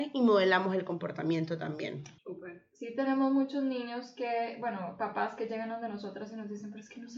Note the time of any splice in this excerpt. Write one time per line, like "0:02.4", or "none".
0:02.2